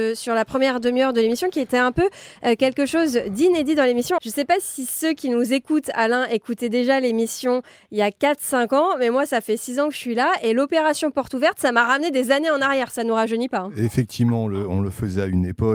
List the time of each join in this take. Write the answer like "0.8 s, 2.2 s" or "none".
4.2 s